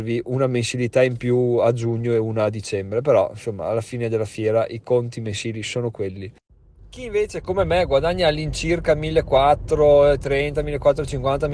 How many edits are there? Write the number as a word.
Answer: zero